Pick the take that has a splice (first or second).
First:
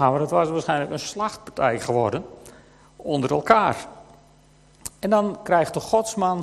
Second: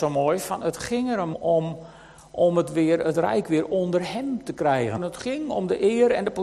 second